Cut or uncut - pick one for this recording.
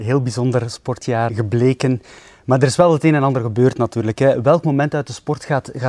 cut